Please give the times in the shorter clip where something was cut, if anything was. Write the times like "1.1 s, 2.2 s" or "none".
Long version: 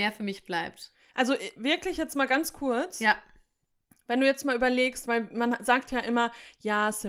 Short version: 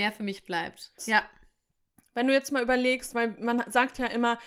1.0 s

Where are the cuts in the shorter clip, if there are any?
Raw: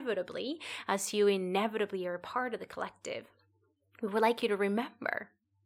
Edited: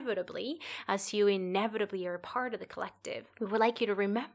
3.3 s

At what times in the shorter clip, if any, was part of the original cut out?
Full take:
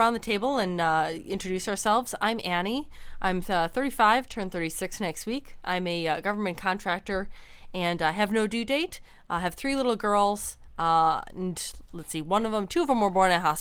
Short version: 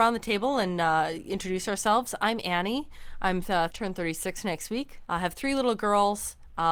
3.7 s, 5.1 s

